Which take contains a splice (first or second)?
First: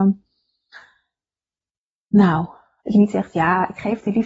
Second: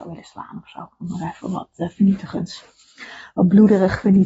first